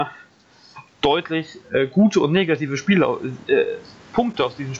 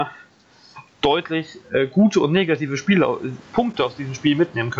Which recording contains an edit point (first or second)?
second